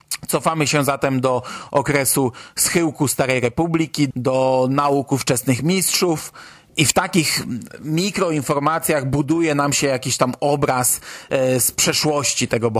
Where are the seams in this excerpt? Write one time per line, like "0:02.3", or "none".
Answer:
0:04.1